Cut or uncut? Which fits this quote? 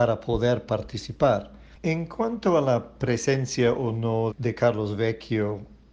cut